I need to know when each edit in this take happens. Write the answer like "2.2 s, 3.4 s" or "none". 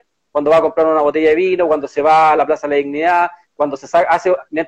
none